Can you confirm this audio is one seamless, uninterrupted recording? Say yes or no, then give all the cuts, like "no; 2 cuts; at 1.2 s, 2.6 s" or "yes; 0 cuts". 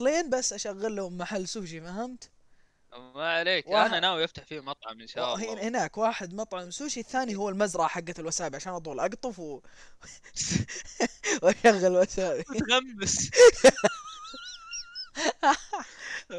yes; 0 cuts